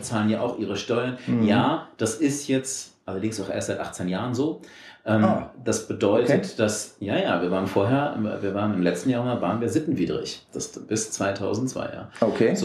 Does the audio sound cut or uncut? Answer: uncut